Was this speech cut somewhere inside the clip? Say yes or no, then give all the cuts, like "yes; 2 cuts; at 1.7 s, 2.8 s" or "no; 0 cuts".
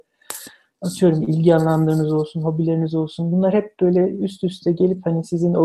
no; 0 cuts